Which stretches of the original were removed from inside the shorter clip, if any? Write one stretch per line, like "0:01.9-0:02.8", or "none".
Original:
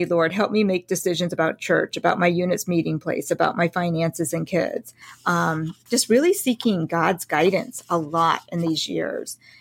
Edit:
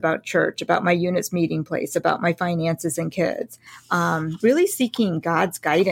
0:05.8-0:06.1